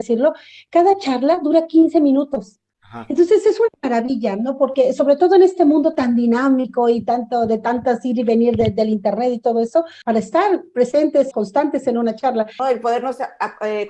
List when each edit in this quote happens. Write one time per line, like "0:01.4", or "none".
0:10.0
0:11.3
0:12.6